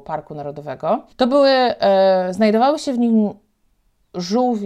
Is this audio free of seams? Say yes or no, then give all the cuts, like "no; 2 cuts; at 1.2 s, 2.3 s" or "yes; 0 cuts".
no; 1 cut; at 1.1 s